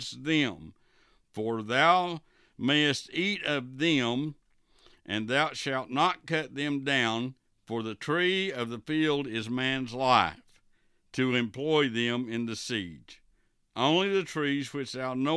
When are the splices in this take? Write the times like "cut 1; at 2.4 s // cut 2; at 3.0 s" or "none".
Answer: none